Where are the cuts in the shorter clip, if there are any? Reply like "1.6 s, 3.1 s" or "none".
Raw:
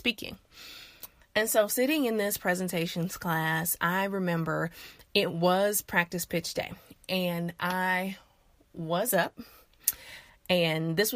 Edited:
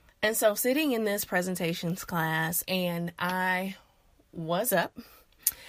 2.6 s